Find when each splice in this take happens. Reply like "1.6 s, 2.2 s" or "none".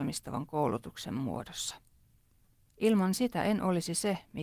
2.7 s